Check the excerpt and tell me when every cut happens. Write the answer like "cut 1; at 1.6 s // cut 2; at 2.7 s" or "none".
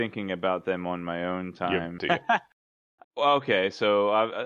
cut 1; at 2.0 s // cut 2; at 3.0 s

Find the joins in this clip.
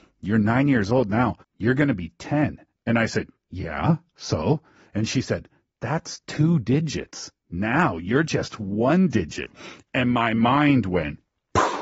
cut 1; at 1.4 s

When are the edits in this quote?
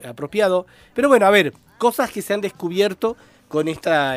cut 1; at 0.9 s

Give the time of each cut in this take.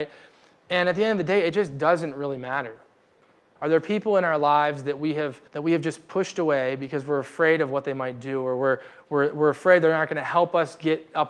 cut 1; at 3.6 s // cut 2; at 5.5 s

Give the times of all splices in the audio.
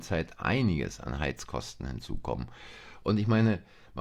none

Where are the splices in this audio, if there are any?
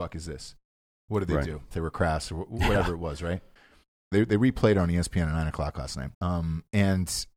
cut 1; at 1.7 s // cut 2; at 4.1 s // cut 3; at 6.1 s

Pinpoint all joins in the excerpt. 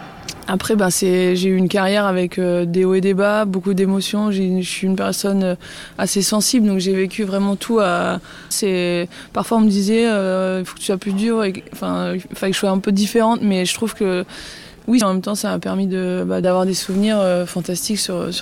cut 1; at 8.5 s // cut 2; at 15.0 s // cut 3; at 16.4 s

